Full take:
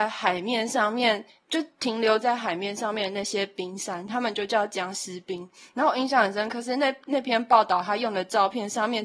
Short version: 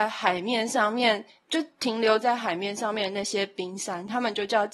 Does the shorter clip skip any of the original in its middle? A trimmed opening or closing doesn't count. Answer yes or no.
no